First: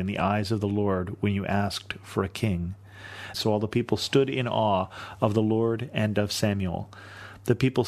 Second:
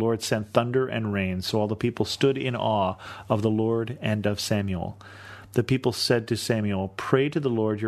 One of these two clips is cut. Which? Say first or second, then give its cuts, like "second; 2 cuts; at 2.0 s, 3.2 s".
first; 1 cut; at 3.3 s